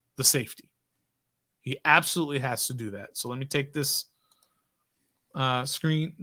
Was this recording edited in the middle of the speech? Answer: no; 0 cuts

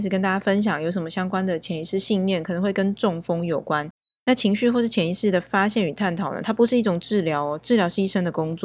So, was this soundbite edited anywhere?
no; 0 cuts

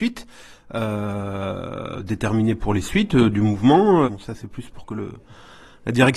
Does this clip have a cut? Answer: yes; 1 cut; at 4.0 s

